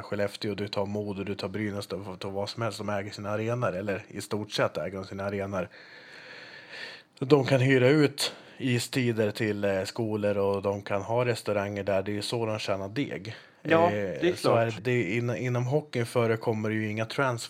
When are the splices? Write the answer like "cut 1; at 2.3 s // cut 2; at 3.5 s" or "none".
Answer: cut 1; at 14.8 s